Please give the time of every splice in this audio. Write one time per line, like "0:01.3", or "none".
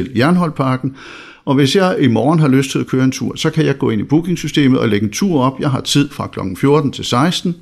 none